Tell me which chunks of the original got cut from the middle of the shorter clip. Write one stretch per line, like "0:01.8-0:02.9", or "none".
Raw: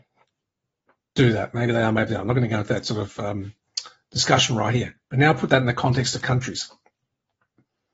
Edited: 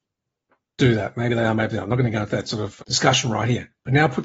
0:03.2-0:04.0